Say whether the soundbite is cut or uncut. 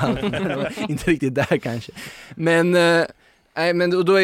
uncut